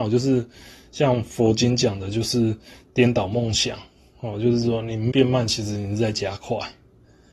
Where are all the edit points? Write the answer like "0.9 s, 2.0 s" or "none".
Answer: 5.1 s